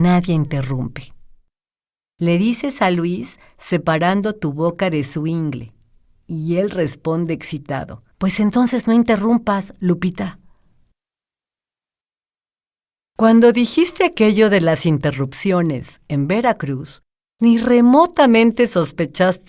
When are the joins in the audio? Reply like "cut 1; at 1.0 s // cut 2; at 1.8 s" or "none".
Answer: cut 1; at 2.0 s // cut 2; at 8.1 s